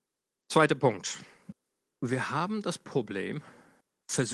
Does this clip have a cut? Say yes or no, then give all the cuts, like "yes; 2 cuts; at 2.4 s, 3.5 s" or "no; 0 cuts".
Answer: no; 0 cuts